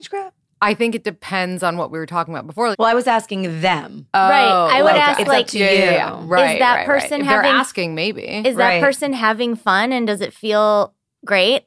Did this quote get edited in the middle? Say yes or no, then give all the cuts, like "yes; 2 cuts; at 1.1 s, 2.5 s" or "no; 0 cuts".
yes; 1 cut; at 2.7 s